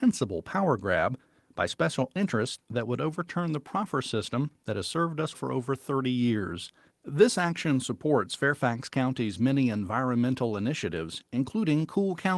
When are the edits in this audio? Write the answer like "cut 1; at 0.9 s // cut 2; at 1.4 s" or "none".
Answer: cut 1; at 5.3 s // cut 2; at 6.9 s